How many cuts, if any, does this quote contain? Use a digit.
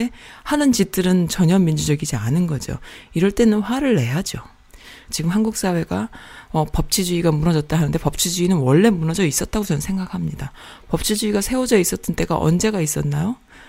1